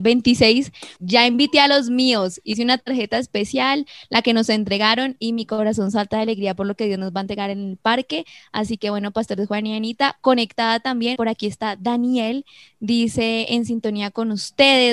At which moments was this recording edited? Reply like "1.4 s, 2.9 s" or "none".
1.0 s, 11.2 s